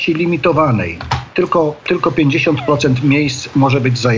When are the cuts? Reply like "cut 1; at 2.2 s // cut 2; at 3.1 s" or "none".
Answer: none